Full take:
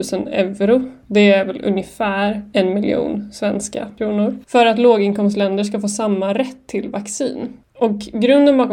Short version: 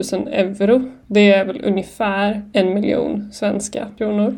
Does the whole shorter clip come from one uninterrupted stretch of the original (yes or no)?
yes